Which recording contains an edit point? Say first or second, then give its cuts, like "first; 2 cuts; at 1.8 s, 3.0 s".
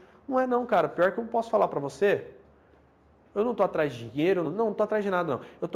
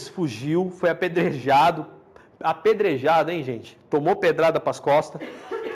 first; 1 cut; at 4.4 s